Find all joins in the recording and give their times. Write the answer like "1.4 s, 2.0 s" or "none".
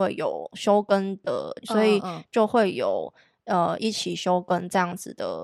1.6 s, 3.8 s

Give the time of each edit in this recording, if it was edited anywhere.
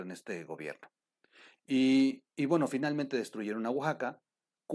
none

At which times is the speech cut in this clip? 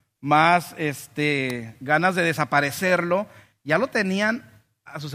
3.5 s

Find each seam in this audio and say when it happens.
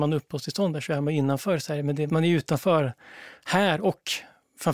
2.1 s

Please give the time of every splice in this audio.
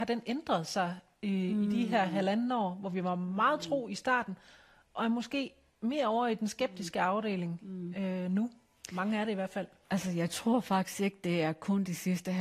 9.8 s

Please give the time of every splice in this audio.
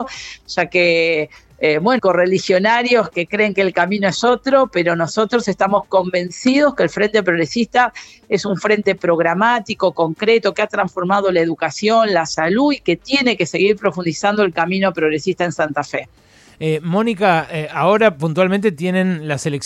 2.0 s, 3.1 s

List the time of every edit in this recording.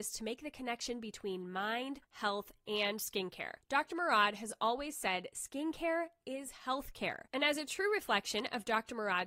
2.0 s

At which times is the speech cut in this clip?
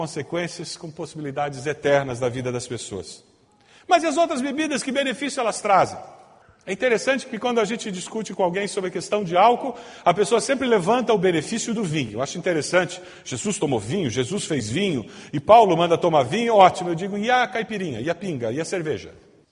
none

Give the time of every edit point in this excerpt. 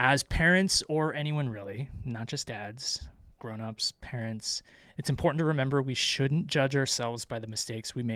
none

